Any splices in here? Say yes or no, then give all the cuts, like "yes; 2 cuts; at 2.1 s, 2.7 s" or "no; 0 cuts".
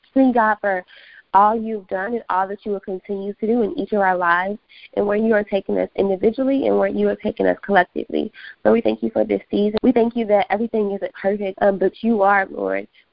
yes; 2 cuts; at 9.8 s, 11.5 s